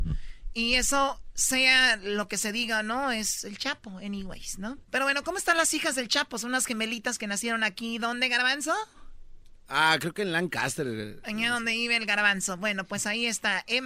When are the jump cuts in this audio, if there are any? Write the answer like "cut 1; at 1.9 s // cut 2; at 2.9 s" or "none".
cut 1; at 4.8 s